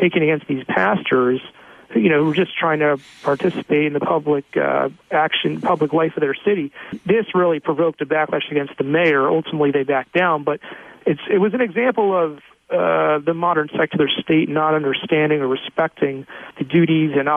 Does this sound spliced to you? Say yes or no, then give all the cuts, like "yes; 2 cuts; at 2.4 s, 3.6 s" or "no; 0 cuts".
no; 0 cuts